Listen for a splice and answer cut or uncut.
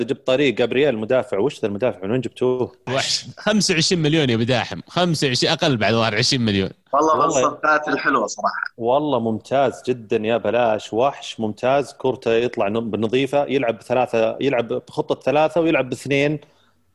cut